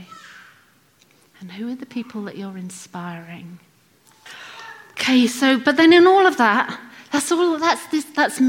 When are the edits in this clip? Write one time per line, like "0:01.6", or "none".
none

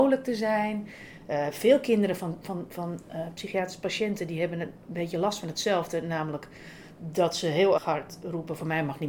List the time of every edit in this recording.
0:07.8

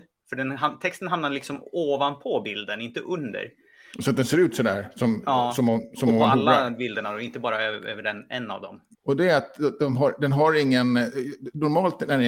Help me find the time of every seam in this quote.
0:03.9
0:08.9

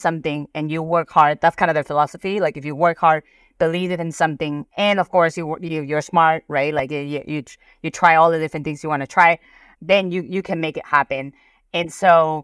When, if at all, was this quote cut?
none

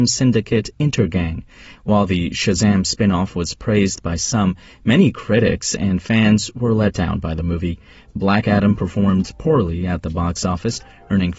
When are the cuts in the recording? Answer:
0:01.8

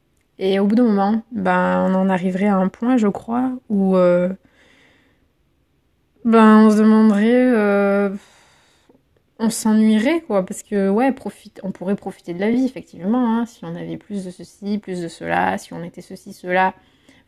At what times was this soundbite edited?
none

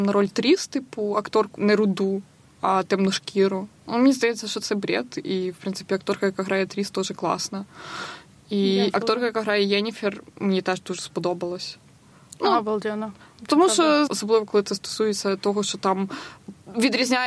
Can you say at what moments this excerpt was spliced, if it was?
0:01.6
0:14.1

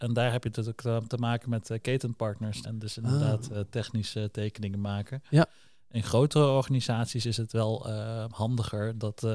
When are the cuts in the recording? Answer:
0:02.6

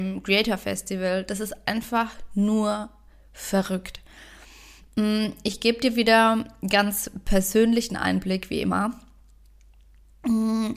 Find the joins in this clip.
none

